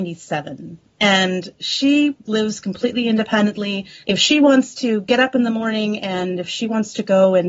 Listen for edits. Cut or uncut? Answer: cut